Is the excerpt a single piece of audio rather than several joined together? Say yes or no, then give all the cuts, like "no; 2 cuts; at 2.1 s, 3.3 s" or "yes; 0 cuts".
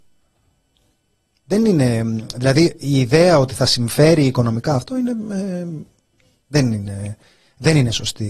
yes; 0 cuts